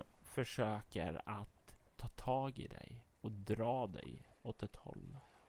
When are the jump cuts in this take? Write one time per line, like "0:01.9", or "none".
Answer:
0:04.4